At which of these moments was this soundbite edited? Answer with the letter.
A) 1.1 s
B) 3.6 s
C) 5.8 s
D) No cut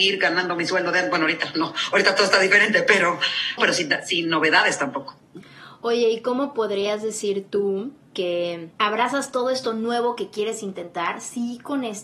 B